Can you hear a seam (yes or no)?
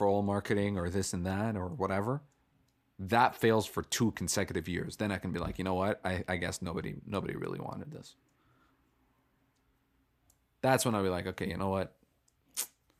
no